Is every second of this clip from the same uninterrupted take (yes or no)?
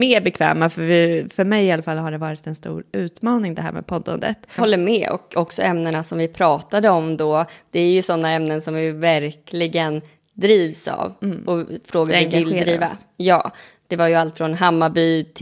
no